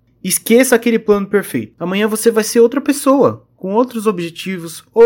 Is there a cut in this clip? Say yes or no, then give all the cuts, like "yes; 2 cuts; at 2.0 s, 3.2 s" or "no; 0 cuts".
yes; 1 cut; at 1.7 s